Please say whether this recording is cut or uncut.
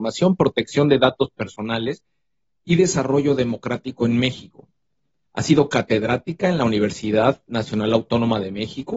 uncut